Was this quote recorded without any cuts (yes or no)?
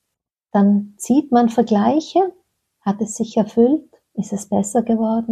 yes